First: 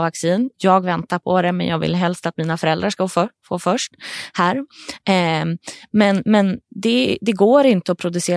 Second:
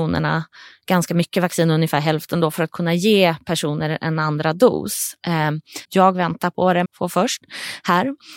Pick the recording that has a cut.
second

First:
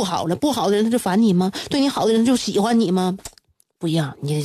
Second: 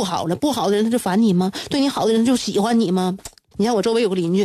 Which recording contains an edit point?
second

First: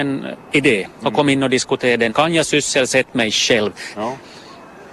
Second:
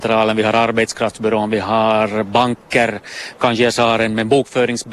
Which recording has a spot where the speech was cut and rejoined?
first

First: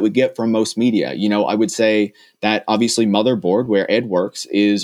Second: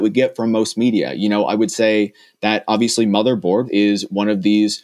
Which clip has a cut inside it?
second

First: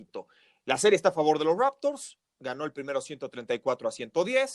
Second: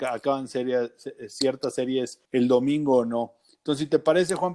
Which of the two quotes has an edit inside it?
second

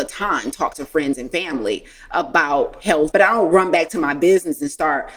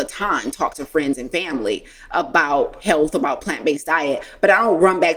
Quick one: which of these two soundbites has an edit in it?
first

